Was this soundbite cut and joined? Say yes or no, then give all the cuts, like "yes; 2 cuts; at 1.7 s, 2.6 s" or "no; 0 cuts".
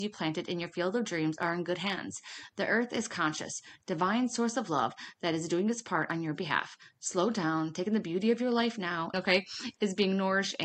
yes; 1 cut; at 9.1 s